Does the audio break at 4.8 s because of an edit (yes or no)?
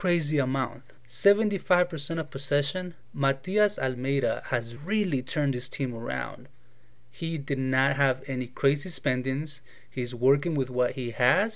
yes